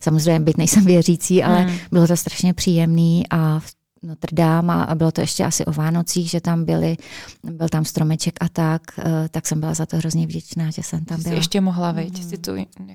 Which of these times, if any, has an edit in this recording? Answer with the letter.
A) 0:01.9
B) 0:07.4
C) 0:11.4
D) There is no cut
D